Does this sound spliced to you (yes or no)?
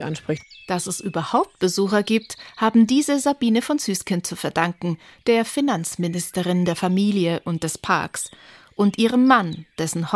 no